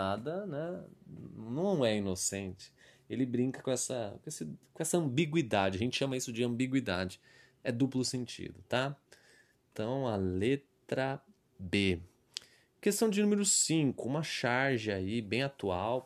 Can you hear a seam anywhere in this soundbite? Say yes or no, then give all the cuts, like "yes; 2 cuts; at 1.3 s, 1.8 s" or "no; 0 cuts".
no; 0 cuts